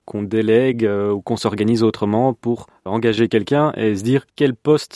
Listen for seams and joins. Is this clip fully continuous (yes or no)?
yes